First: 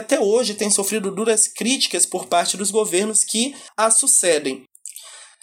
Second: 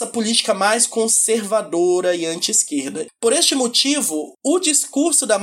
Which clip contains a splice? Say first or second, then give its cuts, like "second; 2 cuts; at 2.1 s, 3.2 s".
second; 1 cut; at 3.1 s